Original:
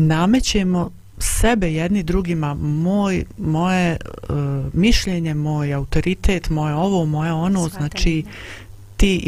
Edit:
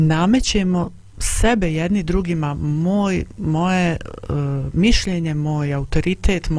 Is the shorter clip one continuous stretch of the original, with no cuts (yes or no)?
yes